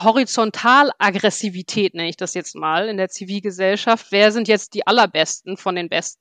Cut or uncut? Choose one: uncut